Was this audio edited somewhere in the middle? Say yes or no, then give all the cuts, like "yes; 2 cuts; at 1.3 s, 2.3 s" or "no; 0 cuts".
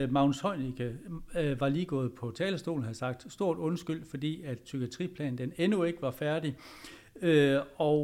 no; 0 cuts